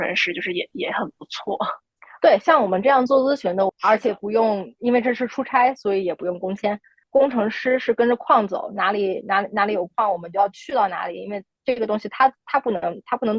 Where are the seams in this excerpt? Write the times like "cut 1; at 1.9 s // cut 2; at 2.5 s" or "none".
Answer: cut 1; at 3.7 s // cut 2; at 7.0 s

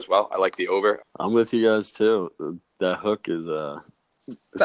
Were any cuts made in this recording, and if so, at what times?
cut 1; at 1.0 s

